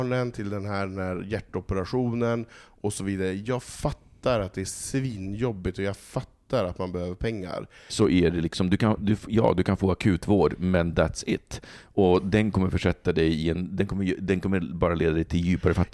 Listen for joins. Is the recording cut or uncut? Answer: cut